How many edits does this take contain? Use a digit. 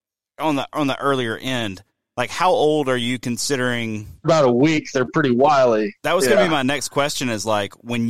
1